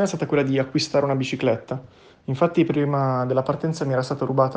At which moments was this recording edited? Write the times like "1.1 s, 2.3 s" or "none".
none